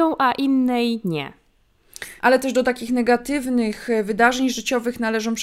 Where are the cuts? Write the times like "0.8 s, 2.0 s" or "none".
2.2 s